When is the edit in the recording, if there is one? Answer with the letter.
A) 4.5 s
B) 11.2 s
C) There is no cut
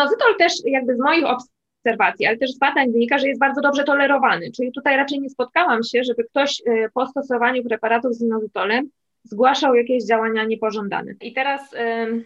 B